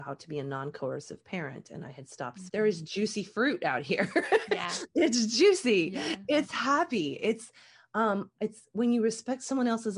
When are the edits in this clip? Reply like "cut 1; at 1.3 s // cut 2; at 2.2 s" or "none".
cut 1; at 2.5 s